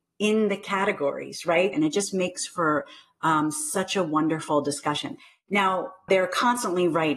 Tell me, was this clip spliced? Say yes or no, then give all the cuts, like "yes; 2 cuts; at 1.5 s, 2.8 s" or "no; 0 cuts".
yes; 2 cuts; at 1.7 s, 6.1 s